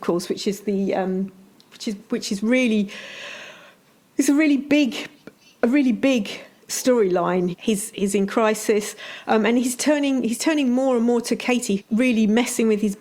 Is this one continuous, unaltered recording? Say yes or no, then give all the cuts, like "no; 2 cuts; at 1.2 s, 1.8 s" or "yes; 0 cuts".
no; 2 cuts; at 7.5 s, 11.8 s